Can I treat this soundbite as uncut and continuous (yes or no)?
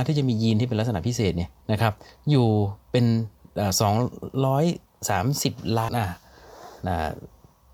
no